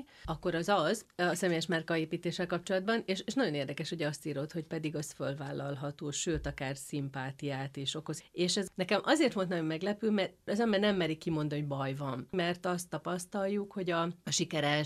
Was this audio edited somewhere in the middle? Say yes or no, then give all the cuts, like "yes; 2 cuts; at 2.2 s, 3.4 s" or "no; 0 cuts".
no; 0 cuts